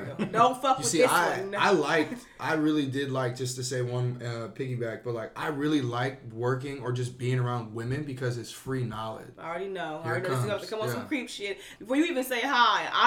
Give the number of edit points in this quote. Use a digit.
2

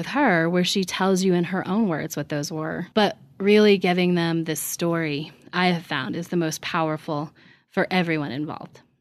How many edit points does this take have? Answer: 1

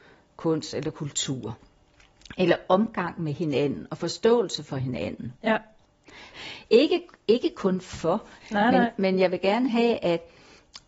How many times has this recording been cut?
2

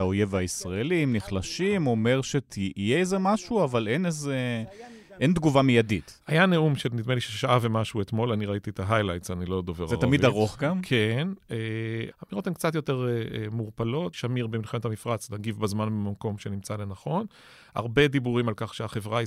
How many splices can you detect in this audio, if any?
3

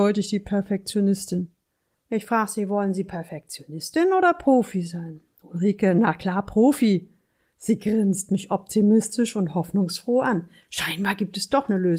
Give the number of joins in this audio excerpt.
0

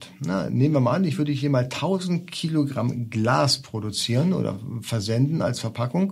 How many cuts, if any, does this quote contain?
0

